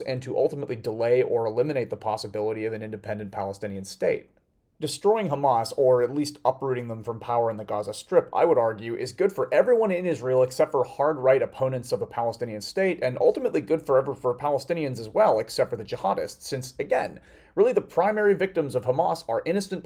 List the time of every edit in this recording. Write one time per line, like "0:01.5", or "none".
none